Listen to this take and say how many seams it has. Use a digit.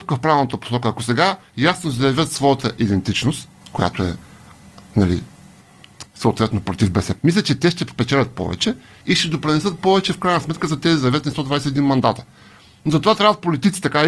2